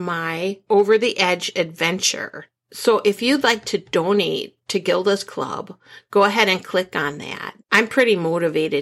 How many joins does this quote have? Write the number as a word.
one